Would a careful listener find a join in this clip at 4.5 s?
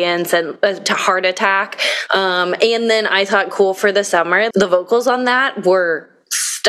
yes; 2 cuts; at 2.1 s, 4.5 s

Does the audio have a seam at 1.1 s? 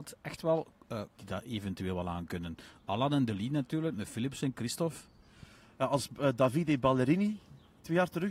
yes; 1 cut; at 1.1 s

